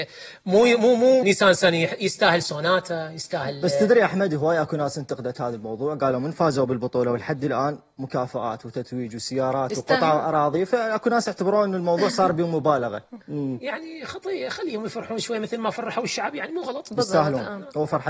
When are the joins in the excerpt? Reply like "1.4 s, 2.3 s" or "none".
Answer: 1.2 s, 13.2 s